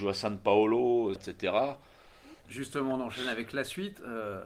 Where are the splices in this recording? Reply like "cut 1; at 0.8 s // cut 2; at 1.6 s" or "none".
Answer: cut 1; at 1.2 s // cut 2; at 2.4 s